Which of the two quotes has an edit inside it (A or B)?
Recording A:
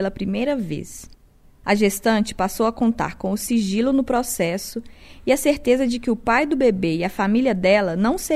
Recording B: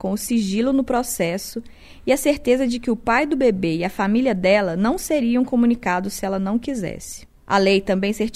B